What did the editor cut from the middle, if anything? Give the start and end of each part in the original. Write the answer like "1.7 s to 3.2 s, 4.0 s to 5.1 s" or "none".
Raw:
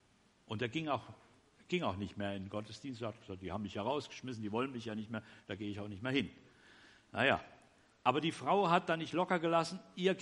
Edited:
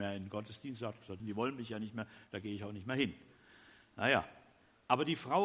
3.4 s to 4.4 s